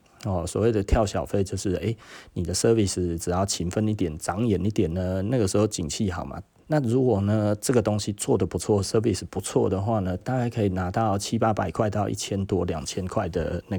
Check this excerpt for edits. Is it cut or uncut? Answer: cut